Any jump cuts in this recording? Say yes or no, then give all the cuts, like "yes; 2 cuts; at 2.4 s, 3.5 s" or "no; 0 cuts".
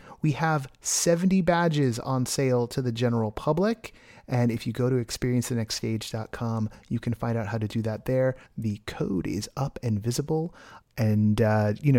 yes; 2 cuts; at 8.5 s, 10.8 s